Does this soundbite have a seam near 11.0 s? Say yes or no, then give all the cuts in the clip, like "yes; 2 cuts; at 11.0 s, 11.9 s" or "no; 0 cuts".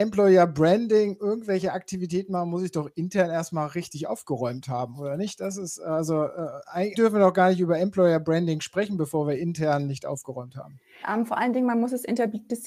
yes; 2 cuts; at 6.9 s, 11.0 s